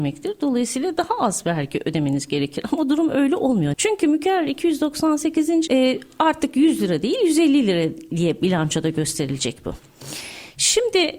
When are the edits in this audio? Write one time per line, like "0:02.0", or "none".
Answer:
0:03.7
0:05.7